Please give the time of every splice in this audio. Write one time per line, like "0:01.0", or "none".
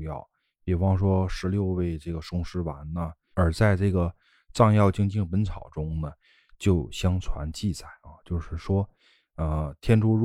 0:03.3